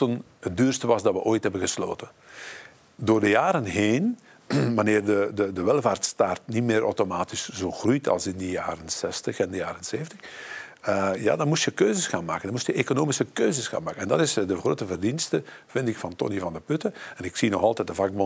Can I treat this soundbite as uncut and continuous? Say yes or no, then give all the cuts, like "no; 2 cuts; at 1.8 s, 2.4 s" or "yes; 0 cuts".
yes; 0 cuts